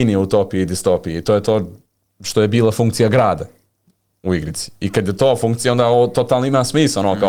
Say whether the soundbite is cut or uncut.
uncut